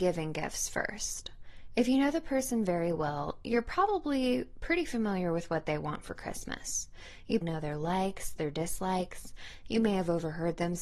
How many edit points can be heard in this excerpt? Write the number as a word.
one